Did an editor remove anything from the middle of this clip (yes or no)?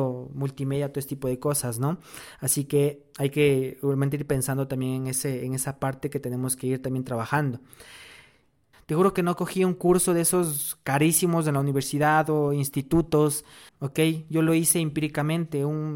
yes